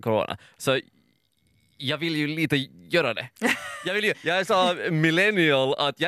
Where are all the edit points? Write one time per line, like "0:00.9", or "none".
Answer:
0:04.1

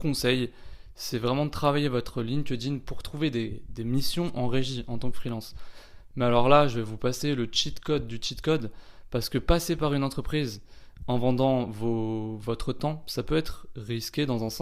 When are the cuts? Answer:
none

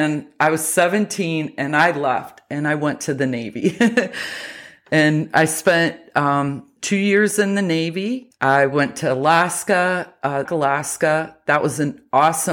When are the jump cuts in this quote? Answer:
0:10.5

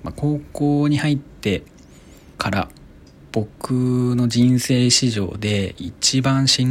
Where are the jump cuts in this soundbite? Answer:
0:02.3

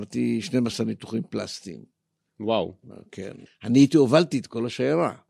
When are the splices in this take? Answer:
0:03.5

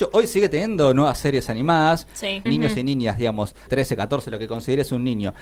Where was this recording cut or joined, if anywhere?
0:02.5
0:03.7

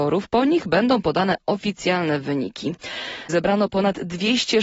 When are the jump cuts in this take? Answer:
0:03.3

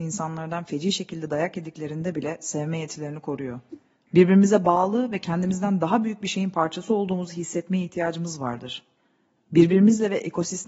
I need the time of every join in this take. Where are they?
0:04.1

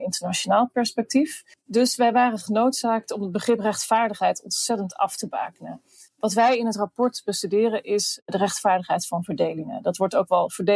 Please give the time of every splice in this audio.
none

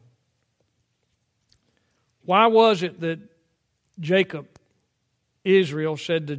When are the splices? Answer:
none

